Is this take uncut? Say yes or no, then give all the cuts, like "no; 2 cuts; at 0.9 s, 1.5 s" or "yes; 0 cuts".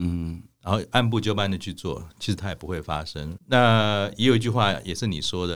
no; 1 cut; at 3.4 s